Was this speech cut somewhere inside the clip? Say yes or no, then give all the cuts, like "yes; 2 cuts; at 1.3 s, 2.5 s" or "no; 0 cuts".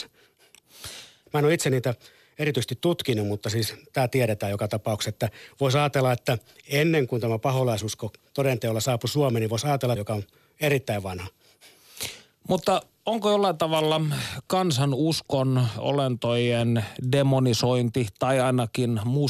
yes; 2 cuts; at 1.3 s, 10.0 s